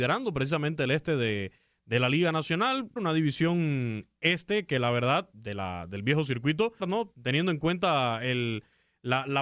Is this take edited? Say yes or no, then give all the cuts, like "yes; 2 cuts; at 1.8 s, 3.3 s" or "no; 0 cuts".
yes; 2 cuts; at 3.0 s, 6.8 s